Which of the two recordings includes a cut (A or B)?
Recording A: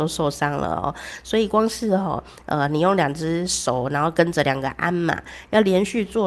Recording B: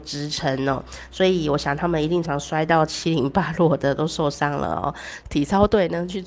B